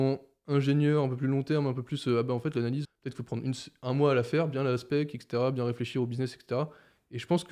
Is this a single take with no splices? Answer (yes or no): no